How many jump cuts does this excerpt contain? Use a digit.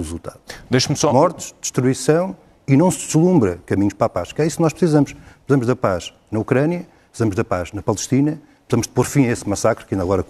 0